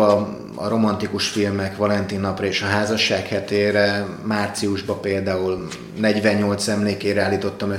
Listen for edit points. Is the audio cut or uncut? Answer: uncut